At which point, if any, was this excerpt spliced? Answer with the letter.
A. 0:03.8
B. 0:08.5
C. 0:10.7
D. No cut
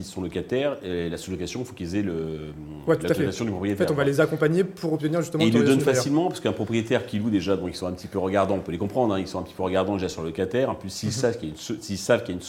D